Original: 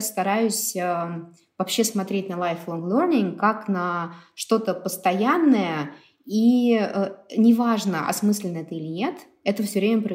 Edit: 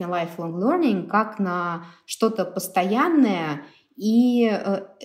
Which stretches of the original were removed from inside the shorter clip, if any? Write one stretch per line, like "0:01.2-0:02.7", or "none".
none